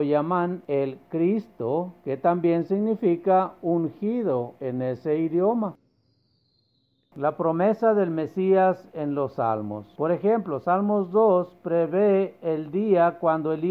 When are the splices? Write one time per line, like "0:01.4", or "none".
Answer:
none